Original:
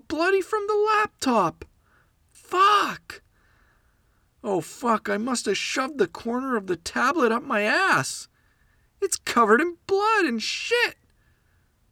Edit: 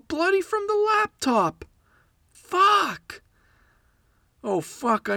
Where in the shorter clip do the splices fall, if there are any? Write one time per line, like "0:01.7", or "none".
none